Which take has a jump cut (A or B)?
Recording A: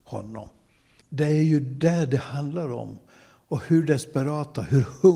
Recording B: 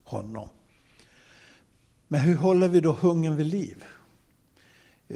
A